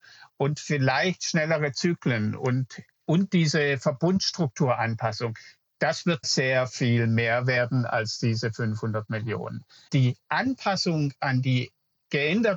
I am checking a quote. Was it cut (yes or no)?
yes